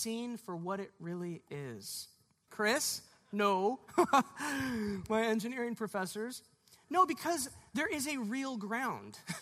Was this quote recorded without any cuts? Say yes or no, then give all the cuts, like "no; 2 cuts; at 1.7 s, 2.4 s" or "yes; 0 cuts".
no; 1 cut; at 2.5 s